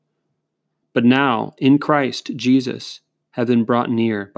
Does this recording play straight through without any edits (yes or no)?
no